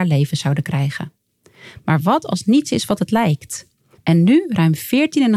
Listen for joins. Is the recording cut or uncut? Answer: cut